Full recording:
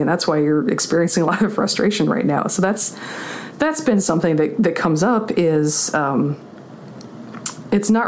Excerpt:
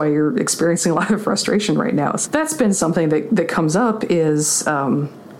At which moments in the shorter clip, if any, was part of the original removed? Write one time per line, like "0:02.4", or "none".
0:02.3